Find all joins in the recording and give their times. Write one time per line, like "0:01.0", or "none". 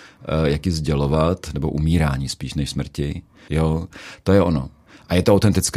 0:03.5